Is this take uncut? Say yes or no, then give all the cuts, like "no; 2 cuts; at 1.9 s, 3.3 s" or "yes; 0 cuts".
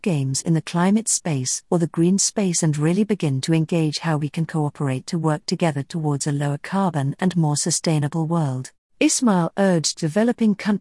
no; 1 cut; at 8.8 s